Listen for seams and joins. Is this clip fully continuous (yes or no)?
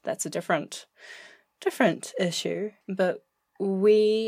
yes